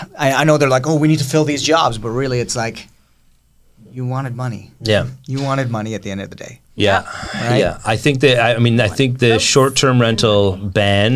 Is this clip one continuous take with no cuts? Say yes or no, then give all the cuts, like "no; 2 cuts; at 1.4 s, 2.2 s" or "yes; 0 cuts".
yes; 0 cuts